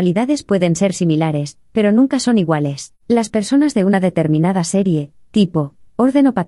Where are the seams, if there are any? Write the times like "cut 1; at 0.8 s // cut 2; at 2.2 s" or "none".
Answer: cut 1; at 3.0 s